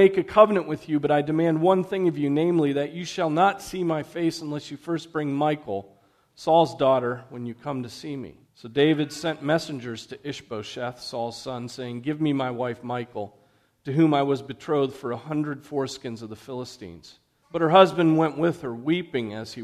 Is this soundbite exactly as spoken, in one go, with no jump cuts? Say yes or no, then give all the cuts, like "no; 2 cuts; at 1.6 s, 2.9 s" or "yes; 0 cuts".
no; 2 cuts; at 8.4 s, 17.4 s